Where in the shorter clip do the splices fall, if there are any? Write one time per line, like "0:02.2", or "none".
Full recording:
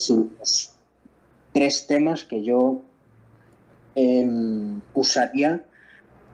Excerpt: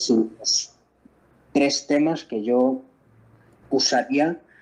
0:03.6

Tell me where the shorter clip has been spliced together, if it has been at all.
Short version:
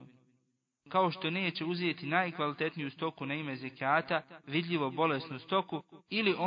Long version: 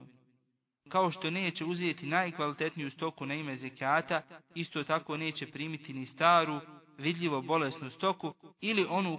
0:04.4

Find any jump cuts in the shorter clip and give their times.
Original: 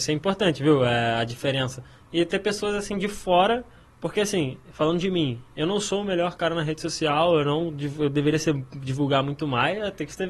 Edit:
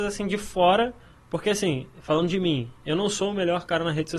none

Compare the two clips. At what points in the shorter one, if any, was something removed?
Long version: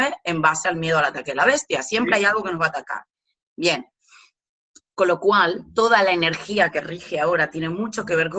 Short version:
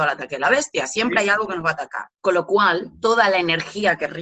0:02.2

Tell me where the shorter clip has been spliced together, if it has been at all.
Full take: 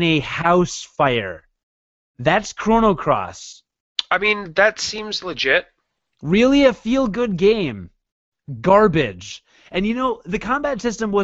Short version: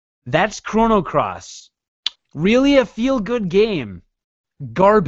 0:02.2

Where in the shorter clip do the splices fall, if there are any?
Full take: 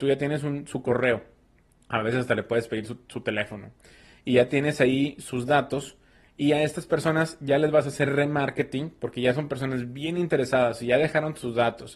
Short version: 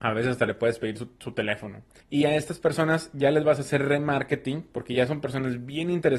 0:02.0

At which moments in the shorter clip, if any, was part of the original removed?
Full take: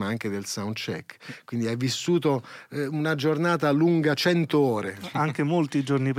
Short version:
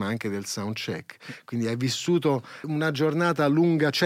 0:02.6

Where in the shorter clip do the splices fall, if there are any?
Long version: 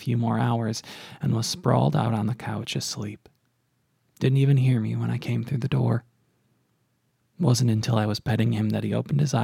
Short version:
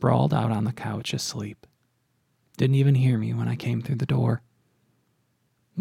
none

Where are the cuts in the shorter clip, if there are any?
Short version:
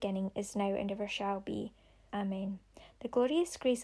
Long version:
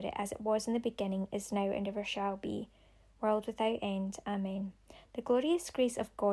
0:02.1

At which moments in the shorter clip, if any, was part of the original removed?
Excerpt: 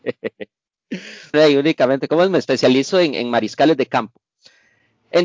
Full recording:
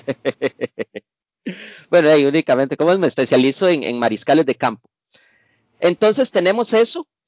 0:01.3

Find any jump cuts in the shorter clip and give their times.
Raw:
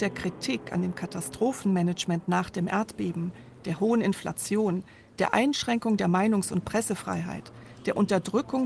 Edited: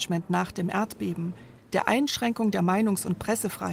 0:01.6

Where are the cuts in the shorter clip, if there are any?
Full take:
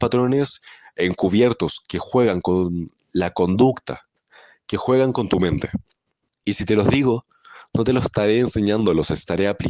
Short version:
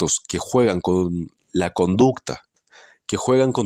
none

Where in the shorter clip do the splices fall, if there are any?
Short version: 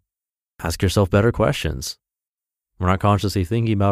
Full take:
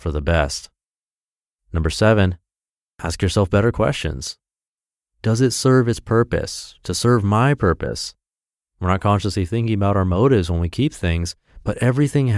0:02.6

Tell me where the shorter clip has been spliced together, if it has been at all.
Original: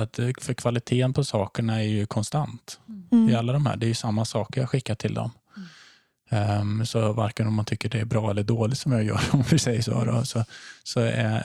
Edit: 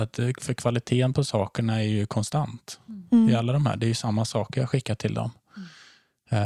none

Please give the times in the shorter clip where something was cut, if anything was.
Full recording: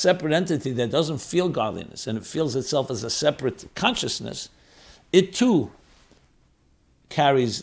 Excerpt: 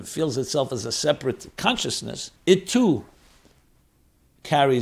0:02.4

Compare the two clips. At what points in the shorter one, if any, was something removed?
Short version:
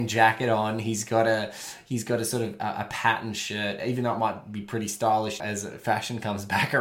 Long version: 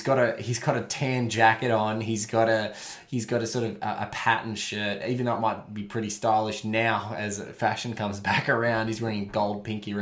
0:05.4

